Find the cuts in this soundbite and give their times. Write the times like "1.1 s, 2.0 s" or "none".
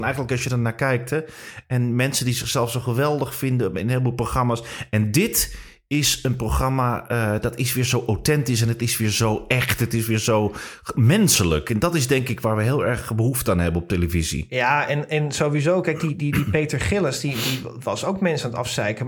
none